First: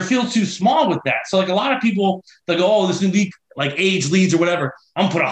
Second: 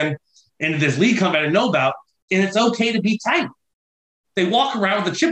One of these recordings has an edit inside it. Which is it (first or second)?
second